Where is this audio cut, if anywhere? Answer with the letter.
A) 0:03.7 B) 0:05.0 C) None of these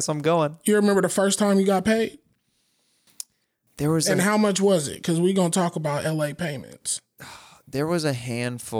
A